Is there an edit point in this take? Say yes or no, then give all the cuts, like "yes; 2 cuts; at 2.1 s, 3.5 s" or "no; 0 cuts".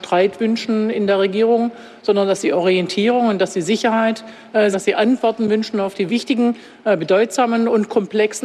yes; 2 cuts; at 4.7 s, 6.1 s